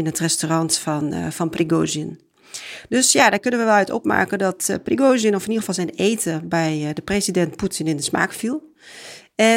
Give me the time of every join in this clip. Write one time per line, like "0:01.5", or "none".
none